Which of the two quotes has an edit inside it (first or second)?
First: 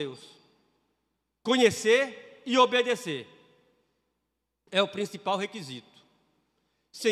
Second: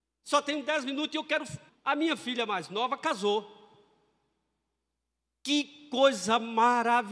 second